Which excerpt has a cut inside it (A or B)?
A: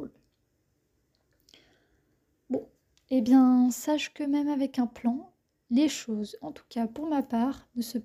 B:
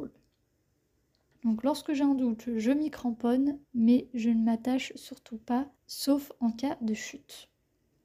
B